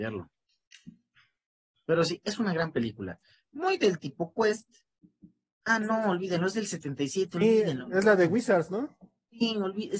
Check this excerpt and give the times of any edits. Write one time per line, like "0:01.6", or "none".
none